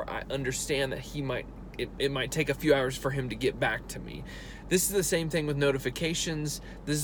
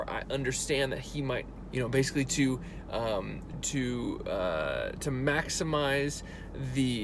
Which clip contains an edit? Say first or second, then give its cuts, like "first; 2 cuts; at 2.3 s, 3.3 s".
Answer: second; 2 cuts; at 1.7 s, 3.5 s